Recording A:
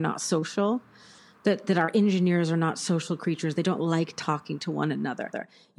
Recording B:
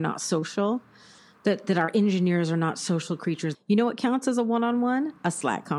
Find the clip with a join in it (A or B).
B